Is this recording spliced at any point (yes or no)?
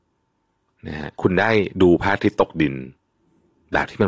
yes